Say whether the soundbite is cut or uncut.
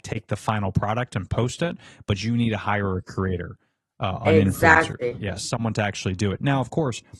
uncut